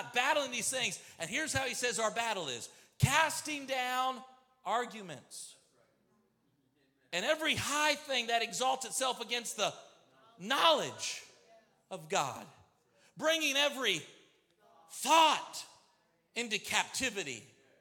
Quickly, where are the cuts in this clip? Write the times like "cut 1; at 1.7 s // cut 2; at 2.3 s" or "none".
none